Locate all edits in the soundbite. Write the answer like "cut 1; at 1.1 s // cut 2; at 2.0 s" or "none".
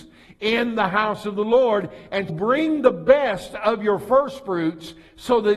cut 1; at 2.3 s